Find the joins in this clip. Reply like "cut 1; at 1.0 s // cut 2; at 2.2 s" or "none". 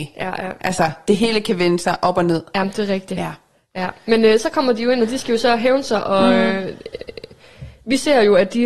none